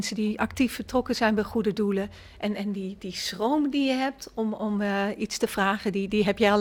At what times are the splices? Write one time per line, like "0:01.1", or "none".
none